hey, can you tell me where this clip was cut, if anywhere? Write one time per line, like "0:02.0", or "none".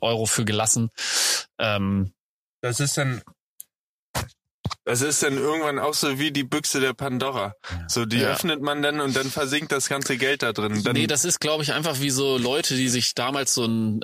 none